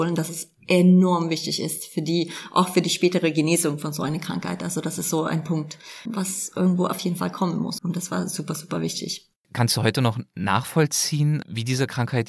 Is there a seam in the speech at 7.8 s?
yes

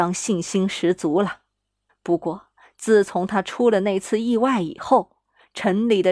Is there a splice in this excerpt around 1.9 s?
yes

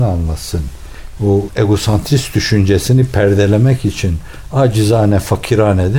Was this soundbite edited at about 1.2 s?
yes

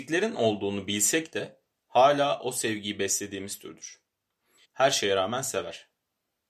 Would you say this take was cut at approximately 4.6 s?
yes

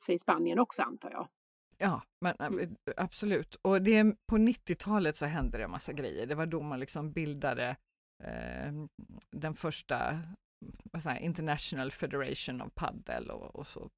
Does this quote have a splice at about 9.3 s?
no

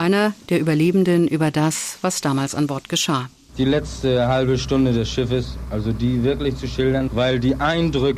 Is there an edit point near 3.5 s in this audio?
no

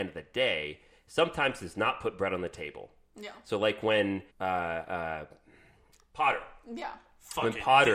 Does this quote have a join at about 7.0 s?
no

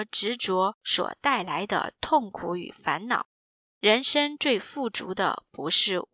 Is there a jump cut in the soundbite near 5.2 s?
no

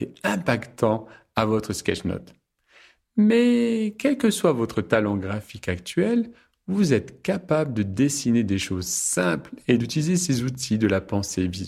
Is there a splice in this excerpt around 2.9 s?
no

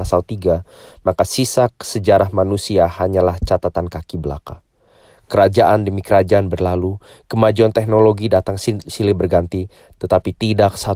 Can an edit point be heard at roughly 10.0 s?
yes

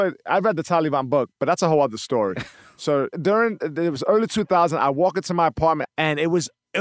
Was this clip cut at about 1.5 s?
no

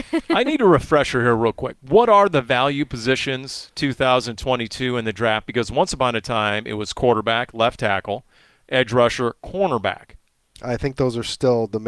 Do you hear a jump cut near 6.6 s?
no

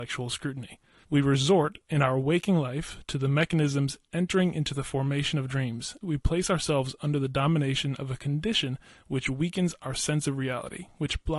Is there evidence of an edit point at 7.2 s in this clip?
no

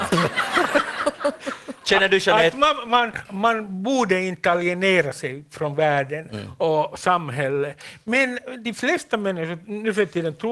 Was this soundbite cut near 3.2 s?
yes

